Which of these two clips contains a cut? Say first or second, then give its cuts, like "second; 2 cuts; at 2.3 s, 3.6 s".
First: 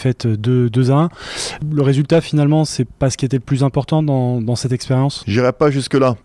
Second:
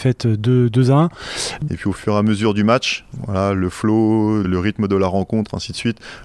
second; 2 cuts; at 1.7 s, 4.4 s